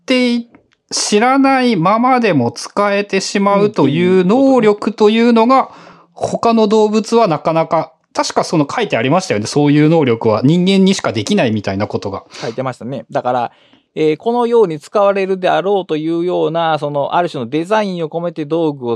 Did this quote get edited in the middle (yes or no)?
no